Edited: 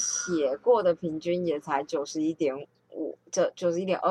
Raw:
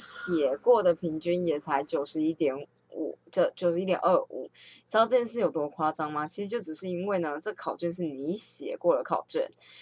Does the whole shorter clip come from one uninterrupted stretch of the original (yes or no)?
yes